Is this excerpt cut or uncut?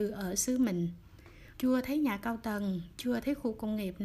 cut